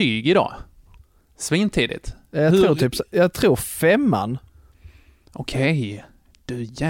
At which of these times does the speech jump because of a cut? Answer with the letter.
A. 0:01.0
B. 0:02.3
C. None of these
A